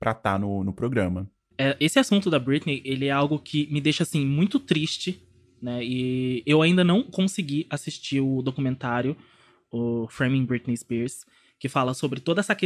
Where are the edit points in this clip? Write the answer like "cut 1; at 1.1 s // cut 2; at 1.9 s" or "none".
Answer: cut 1; at 1.5 s